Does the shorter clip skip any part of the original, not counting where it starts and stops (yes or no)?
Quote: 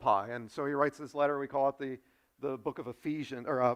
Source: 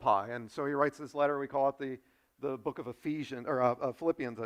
no